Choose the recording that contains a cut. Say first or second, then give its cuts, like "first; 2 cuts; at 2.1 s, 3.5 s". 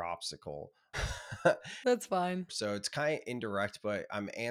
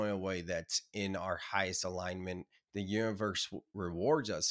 first; 2 cuts; at 0.9 s, 2.5 s